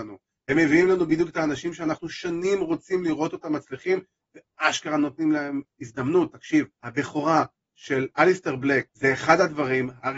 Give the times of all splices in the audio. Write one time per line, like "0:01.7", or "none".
0:06.7
0:08.9